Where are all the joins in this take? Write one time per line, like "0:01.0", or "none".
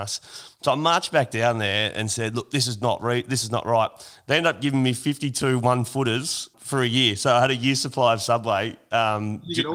0:06.5